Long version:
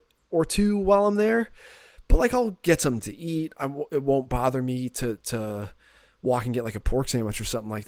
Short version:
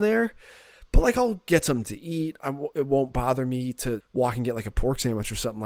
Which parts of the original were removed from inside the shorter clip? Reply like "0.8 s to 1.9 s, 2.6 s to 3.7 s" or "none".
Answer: 5.2 s to 6.1 s